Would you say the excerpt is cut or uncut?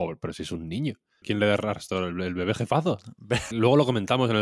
cut